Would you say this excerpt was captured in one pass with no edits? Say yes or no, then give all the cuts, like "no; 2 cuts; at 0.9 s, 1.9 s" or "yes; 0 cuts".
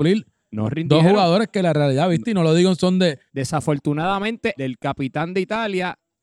no; 2 cuts; at 3.3 s, 4.6 s